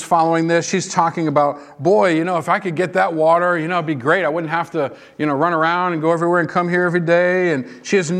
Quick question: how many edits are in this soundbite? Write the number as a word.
zero